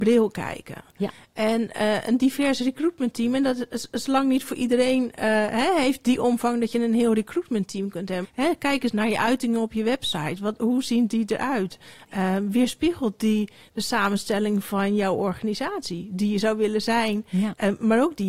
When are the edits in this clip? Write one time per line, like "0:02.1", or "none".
0:08.2

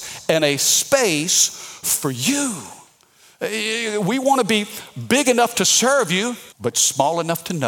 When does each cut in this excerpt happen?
0:06.5

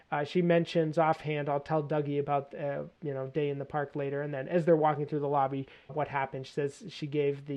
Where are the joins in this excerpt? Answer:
0:03.0
0:05.9

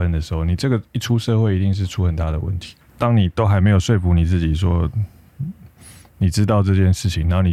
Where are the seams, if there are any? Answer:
0:02.9

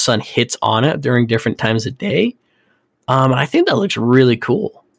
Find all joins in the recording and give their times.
none

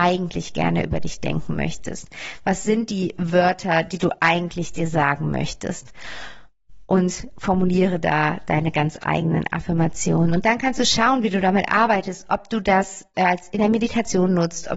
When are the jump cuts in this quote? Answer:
none

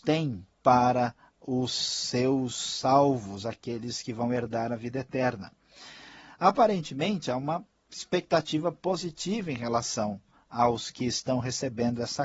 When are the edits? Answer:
none

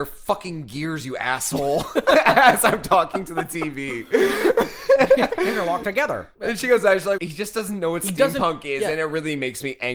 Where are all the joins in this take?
0:07.2

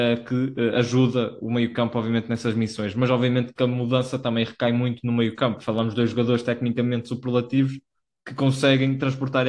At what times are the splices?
0:05.6

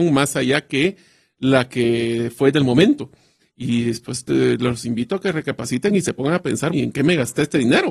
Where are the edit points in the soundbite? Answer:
0:03.4
0:06.7

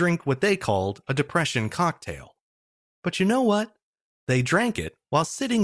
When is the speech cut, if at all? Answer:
none

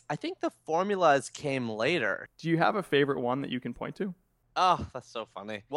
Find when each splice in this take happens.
0:02.3

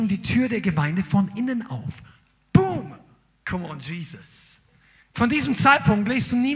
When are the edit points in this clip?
0:03.4
0:05.0

